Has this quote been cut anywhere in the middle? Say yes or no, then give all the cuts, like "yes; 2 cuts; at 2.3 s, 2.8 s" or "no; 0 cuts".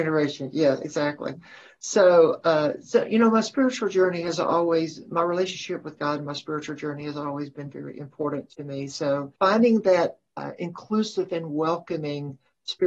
yes; 1 cut; at 9.4 s